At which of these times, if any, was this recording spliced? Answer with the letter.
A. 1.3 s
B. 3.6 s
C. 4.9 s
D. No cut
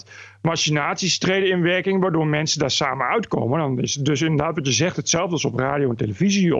D